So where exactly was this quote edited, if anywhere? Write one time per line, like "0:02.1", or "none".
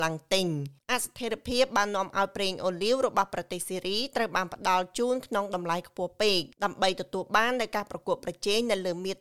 0:06.5